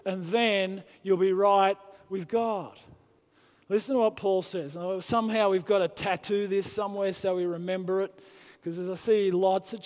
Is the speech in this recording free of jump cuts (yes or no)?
yes